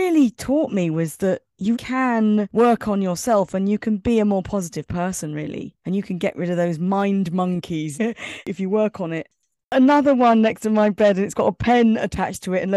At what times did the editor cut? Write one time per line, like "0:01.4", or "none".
0:01.7
0:07.9